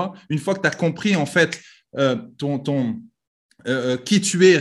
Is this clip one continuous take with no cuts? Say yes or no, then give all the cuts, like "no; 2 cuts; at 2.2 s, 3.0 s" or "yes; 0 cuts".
yes; 0 cuts